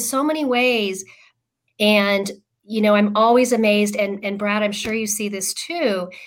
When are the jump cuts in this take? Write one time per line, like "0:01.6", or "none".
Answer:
0:01.7